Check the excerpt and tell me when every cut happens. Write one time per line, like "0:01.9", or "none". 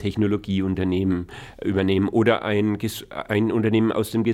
none

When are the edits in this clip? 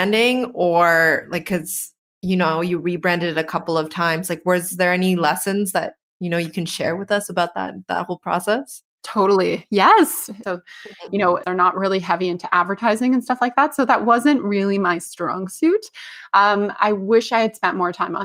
0:10.4
0:11.4

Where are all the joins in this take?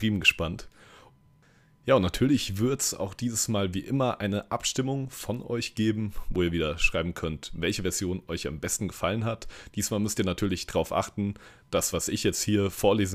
none

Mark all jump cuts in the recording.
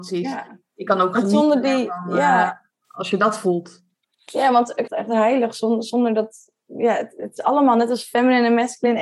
0:04.9

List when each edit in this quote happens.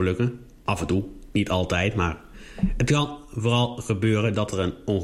none

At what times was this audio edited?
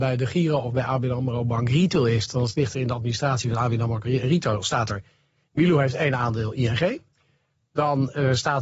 none

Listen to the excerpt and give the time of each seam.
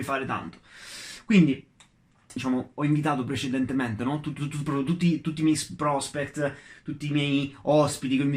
0:02.4

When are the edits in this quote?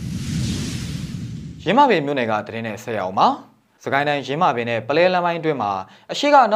none

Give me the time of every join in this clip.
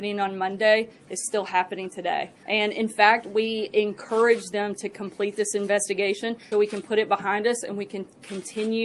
0:02.4
0:06.5

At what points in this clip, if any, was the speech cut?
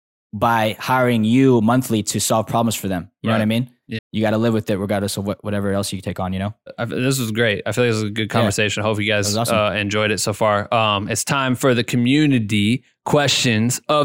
0:04.0

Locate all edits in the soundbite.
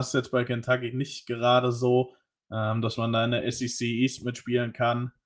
none

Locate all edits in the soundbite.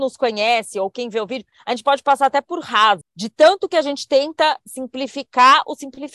0:03.0

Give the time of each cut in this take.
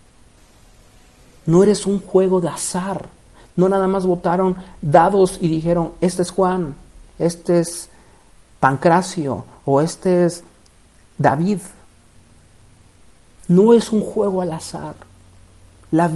0:07.1
0:13.4

